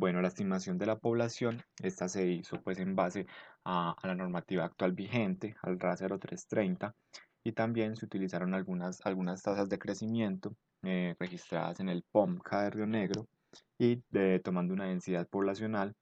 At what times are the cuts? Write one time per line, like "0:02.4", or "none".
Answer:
0:01.7
0:07.3

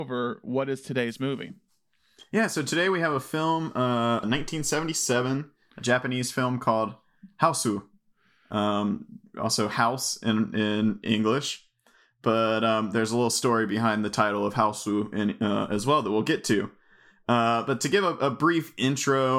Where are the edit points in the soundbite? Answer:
0:04.2

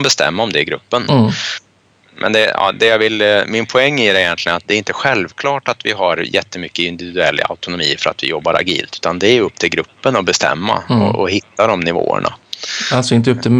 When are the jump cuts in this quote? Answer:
none

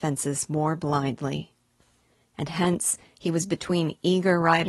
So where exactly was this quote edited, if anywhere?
0:02.2

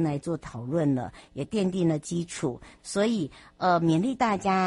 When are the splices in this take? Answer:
0:02.8

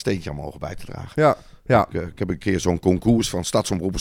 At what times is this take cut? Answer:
0:01.1

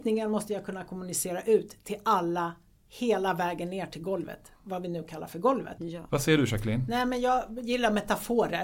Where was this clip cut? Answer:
0:05.8

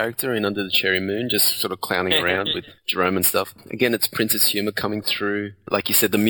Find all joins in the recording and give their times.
0:02.8

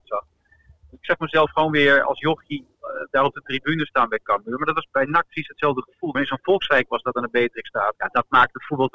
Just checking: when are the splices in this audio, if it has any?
0:04.9
0:06.1
0:07.9

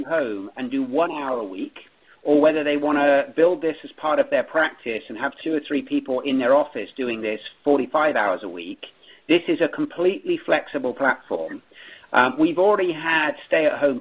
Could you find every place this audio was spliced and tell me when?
none

